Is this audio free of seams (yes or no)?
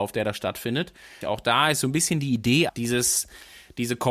no